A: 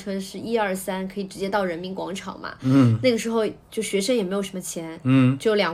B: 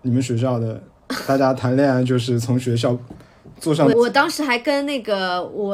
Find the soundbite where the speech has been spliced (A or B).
B